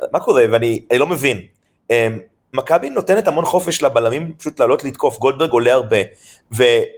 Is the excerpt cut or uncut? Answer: uncut